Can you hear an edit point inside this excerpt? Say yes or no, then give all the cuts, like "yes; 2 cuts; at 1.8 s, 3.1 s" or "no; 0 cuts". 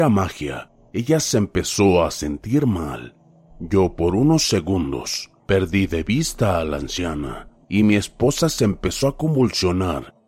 yes; 1 cut; at 7.6 s